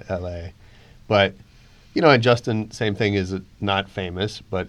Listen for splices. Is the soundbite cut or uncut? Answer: uncut